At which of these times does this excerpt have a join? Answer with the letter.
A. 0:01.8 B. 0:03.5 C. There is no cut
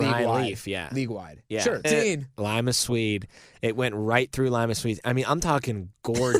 A